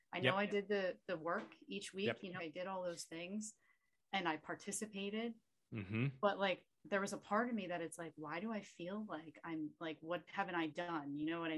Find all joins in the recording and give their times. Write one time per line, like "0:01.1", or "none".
0:02.4
0:10.0